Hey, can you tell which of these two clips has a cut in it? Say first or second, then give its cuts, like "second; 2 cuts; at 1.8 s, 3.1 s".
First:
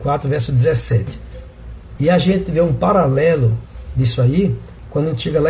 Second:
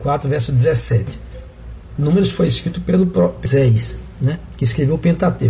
first; 1 cut; at 2.0 s